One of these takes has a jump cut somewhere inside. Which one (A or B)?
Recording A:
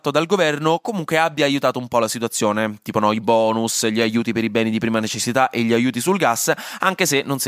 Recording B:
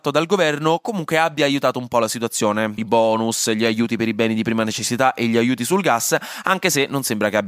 B